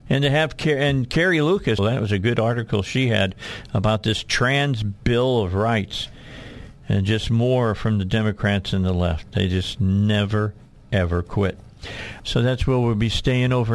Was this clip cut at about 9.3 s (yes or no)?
no